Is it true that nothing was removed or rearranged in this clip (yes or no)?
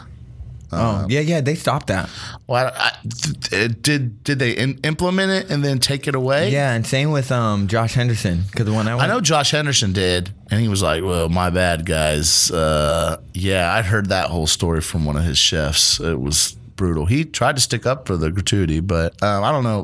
yes